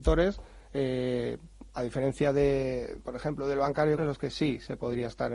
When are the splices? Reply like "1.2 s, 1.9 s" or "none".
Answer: 4.0 s

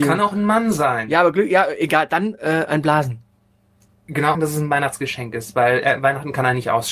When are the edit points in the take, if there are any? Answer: 4.3 s

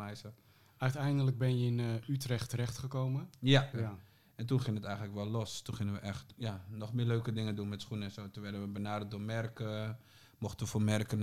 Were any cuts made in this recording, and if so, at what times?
3.7 s

